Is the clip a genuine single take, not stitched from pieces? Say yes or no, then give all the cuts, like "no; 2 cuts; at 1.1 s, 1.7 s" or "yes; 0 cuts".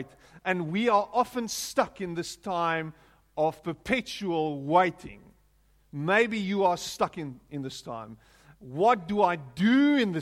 yes; 0 cuts